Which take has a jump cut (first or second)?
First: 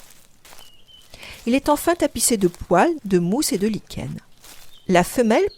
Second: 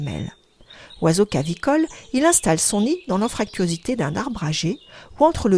first